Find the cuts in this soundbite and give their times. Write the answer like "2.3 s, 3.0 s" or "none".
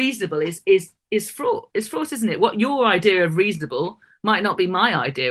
none